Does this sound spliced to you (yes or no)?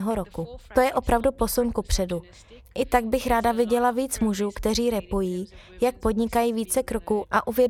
no